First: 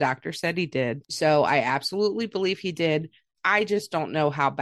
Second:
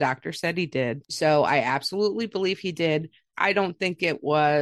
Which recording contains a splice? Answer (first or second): second